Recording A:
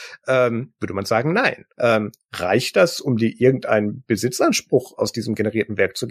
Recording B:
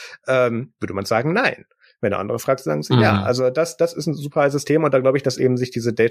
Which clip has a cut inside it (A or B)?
A